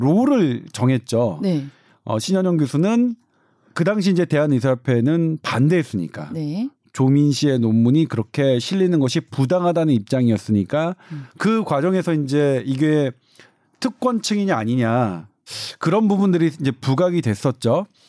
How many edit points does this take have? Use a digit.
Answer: 1